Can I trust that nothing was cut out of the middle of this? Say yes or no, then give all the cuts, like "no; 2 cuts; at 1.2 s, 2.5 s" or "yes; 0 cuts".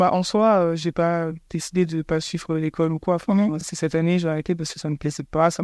yes; 0 cuts